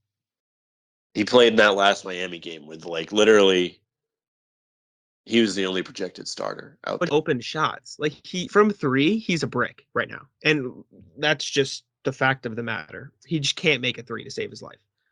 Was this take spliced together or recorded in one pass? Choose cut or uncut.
cut